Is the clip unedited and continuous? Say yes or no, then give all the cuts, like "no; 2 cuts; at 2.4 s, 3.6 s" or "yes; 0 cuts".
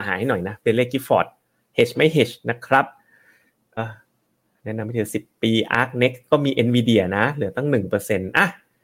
no; 1 cut; at 3.8 s